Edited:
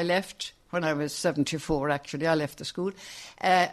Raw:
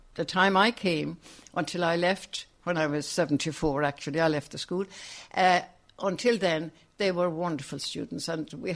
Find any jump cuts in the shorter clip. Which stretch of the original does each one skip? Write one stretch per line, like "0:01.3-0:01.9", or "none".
none